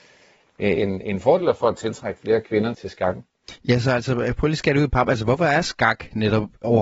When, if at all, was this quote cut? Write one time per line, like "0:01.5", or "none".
0:02.7